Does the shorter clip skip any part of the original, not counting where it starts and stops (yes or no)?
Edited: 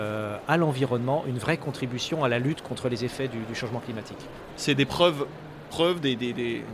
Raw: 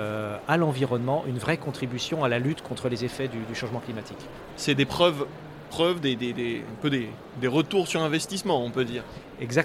no